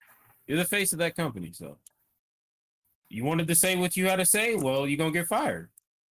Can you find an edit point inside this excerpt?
no; 0 cuts

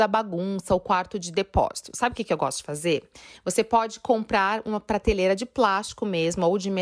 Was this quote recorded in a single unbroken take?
yes; 0 cuts

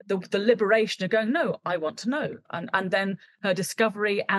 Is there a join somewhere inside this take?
no; 0 cuts

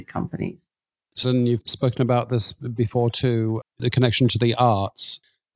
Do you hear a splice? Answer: yes; 1 cut; at 1.2 s

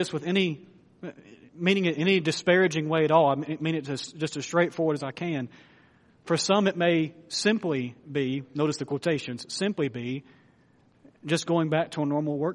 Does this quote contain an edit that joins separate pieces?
no; 0 cuts

